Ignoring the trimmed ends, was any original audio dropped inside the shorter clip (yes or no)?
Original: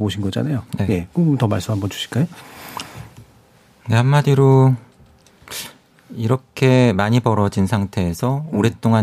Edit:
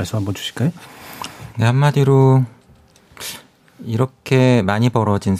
yes